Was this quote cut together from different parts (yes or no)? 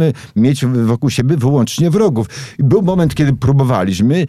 no